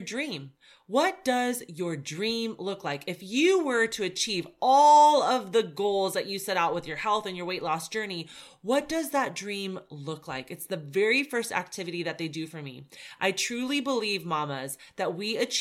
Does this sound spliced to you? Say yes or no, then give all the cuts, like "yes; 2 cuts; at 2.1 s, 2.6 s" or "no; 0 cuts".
no; 0 cuts